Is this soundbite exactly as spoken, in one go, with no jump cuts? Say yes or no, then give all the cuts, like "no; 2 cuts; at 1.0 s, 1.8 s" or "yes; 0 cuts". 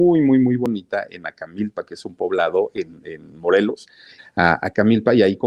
no; 1 cut; at 4.2 s